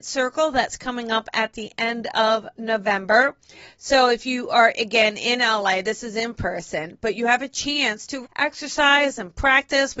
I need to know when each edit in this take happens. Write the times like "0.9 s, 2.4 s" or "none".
8.2 s